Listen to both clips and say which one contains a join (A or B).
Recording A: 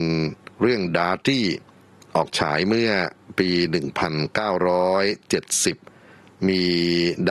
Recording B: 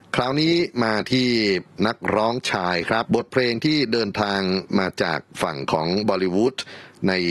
B